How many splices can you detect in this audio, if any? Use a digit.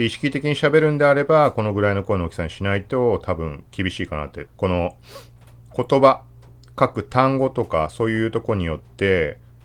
1